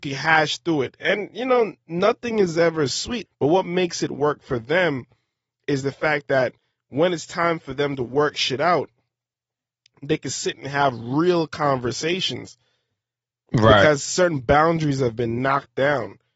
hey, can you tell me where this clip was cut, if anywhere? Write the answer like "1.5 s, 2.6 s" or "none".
3.3 s